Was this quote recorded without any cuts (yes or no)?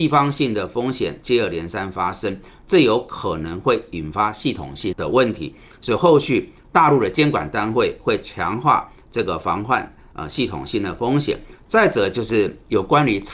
no